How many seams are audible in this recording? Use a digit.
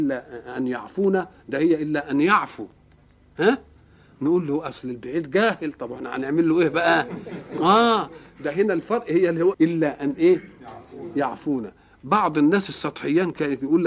1